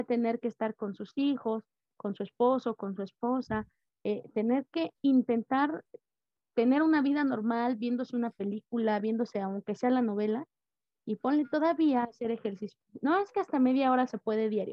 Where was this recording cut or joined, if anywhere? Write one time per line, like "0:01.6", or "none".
none